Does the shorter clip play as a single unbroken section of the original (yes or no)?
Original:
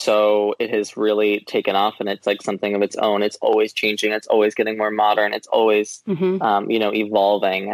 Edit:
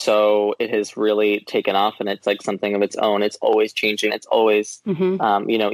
no